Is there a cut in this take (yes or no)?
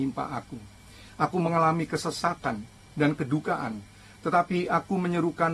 no